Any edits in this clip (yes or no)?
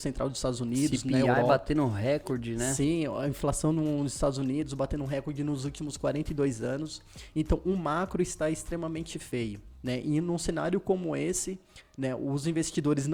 no